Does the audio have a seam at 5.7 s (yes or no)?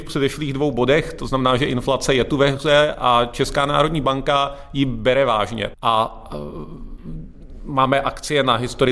yes